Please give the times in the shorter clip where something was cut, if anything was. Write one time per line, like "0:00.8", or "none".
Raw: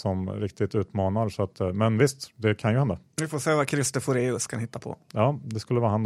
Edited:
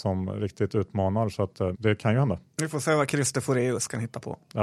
0:01.7